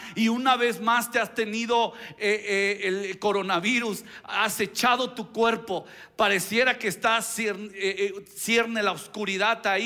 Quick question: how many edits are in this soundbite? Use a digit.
1